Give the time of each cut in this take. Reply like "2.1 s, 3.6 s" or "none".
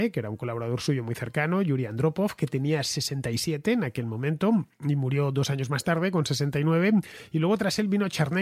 none